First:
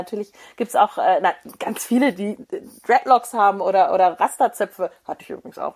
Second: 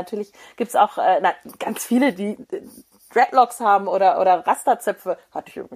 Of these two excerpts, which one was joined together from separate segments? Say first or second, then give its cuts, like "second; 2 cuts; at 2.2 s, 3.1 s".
first; 1 cut; at 2.8 s